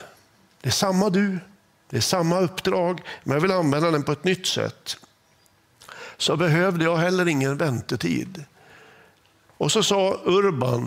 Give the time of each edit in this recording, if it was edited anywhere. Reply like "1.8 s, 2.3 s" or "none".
9.5 s